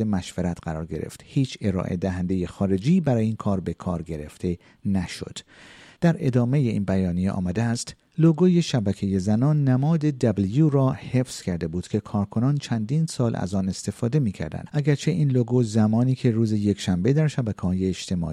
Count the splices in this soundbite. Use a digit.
1